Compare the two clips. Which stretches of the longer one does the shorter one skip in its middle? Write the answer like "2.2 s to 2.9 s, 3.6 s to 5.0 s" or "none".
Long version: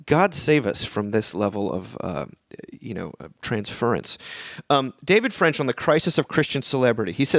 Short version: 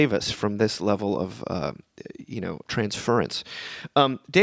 3.2 s to 3.4 s